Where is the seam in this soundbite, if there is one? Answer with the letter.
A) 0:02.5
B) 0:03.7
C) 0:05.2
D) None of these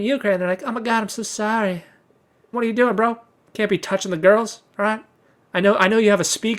A